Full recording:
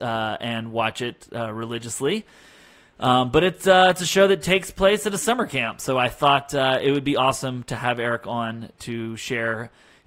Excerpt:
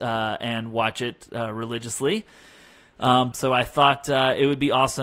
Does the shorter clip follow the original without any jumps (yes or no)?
no